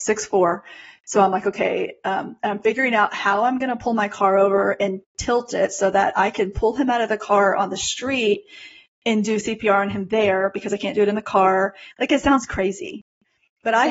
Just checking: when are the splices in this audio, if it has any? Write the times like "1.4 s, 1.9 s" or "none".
11.9 s

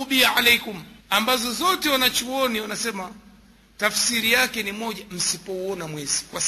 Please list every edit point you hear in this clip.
1.0 s

